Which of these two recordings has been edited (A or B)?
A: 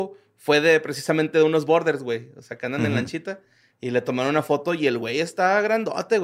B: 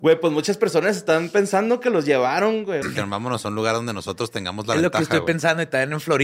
B